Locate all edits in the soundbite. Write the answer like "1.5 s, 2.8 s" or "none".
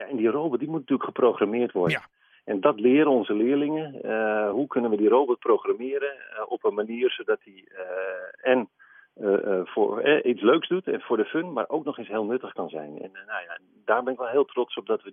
none